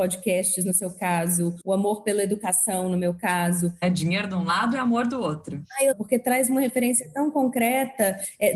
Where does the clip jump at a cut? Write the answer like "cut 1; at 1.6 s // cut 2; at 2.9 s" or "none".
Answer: cut 1; at 3.8 s // cut 2; at 5.9 s